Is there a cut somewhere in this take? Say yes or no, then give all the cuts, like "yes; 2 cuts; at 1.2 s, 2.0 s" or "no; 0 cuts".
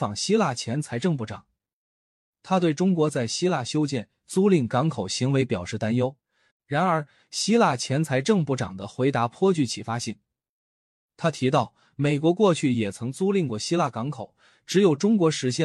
yes; 1 cut; at 6.5 s